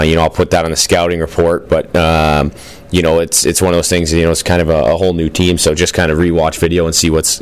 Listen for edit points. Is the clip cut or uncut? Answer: uncut